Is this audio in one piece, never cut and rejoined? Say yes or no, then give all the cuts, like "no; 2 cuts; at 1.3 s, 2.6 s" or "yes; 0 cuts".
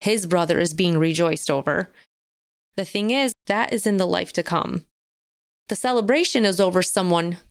no; 1 cut; at 3.3 s